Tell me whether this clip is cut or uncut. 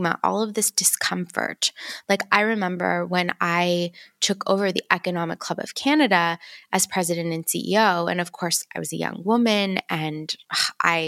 uncut